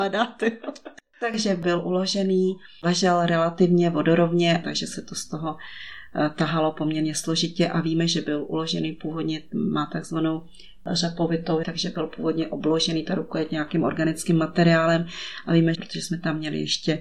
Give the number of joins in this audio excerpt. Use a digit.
3